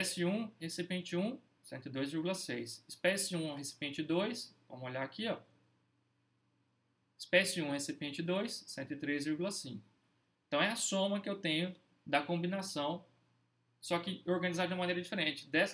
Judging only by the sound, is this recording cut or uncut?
uncut